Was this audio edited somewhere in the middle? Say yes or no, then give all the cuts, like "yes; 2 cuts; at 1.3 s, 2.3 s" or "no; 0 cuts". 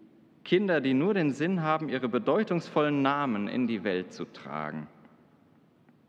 no; 0 cuts